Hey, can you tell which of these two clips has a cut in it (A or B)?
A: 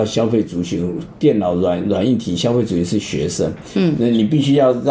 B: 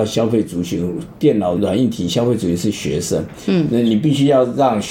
B